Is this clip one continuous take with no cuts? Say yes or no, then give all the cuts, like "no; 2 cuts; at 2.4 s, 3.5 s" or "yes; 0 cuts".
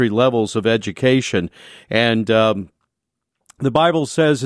yes; 0 cuts